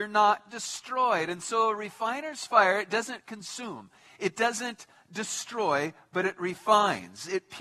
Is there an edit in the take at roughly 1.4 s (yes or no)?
no